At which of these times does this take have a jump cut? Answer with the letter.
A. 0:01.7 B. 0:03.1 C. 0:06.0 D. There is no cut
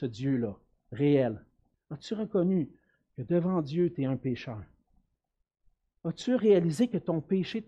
A